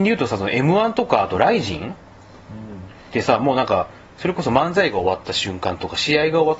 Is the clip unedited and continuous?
yes; 0 cuts

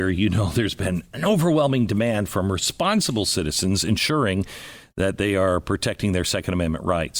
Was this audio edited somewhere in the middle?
no; 0 cuts

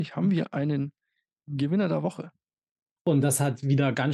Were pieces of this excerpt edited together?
yes; 1 cut; at 3.0 s

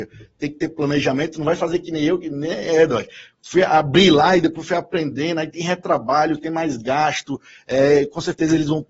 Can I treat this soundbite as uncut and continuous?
yes; 0 cuts

